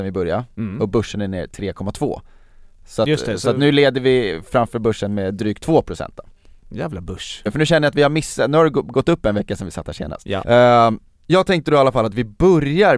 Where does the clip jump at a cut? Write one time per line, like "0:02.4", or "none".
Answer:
0:07.5
0:10.4